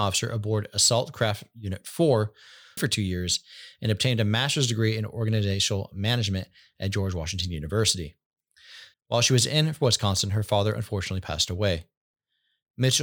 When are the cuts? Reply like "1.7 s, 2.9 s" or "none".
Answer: 2.8 s, 8.9 s